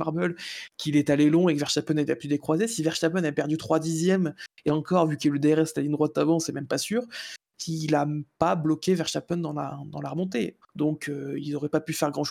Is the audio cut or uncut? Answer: cut